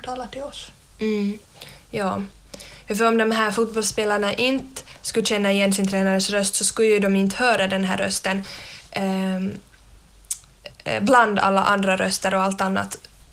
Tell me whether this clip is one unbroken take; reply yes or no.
yes